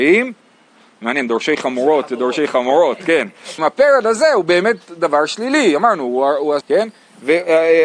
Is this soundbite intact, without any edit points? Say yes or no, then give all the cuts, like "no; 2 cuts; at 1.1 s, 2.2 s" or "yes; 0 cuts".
no; 2 cuts; at 3.6 s, 6.6 s